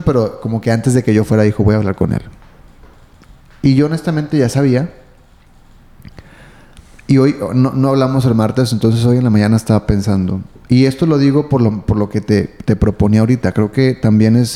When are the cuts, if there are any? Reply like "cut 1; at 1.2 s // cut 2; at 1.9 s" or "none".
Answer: none